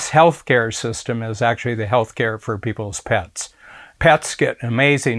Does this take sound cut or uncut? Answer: uncut